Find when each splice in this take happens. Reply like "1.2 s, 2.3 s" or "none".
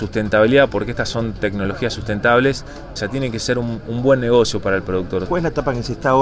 3.0 s, 5.3 s